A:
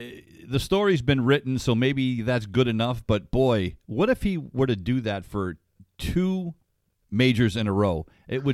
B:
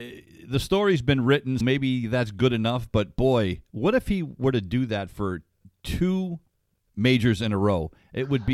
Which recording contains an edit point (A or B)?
B